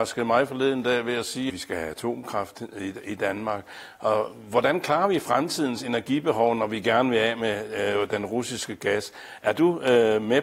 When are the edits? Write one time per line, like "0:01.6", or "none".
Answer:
0:01.5